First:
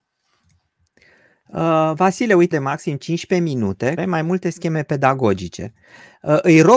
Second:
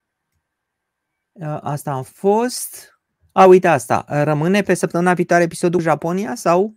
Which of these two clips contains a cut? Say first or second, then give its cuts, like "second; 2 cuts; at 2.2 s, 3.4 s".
first; 2 cuts; at 2.5 s, 4.0 s